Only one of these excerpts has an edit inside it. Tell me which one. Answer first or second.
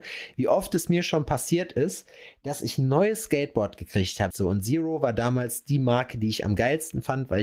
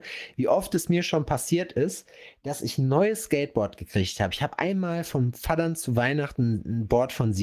first